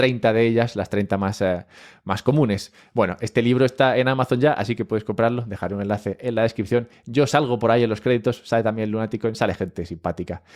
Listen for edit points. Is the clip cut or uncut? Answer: uncut